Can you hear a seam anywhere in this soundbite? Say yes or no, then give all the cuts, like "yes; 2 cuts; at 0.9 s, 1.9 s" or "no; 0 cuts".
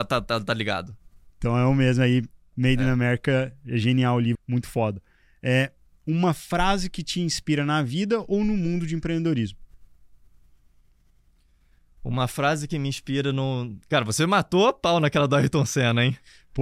yes; 1 cut; at 4.4 s